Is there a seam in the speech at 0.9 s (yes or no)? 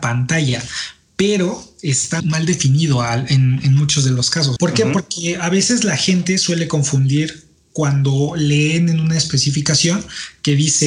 no